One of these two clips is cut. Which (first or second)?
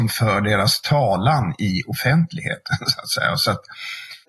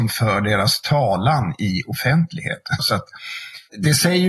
second